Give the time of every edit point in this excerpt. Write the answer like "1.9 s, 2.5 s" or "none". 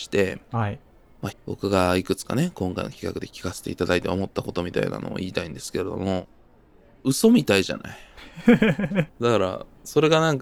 1.3 s, 9.1 s